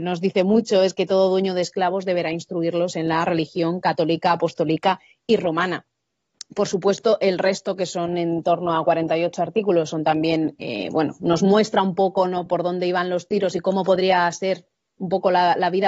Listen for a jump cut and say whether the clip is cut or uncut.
uncut